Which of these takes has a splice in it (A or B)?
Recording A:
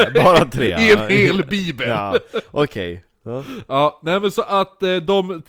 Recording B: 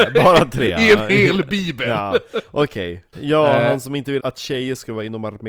B